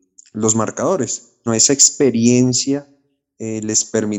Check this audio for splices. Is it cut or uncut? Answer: cut